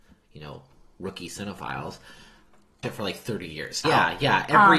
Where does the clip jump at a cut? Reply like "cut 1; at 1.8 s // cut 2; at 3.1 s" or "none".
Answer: cut 1; at 2.8 s // cut 2; at 3.8 s